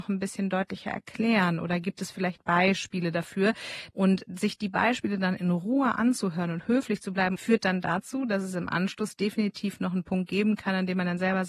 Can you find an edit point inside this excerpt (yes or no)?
no